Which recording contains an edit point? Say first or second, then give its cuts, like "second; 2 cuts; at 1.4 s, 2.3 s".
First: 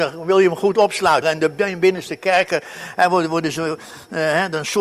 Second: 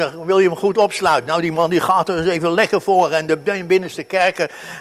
first; 1 cut; at 1.2 s